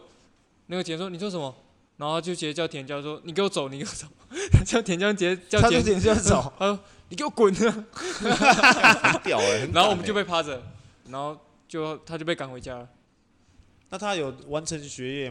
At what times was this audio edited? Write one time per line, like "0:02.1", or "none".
0:11.1
0:14.4